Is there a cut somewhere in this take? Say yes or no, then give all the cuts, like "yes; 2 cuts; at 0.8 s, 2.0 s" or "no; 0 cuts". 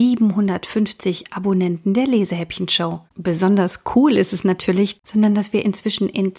yes; 2 cuts; at 3.1 s, 5.0 s